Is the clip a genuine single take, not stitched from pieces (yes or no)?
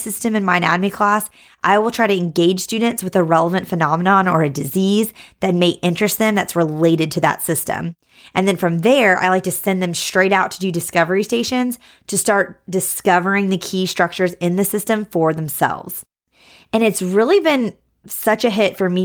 yes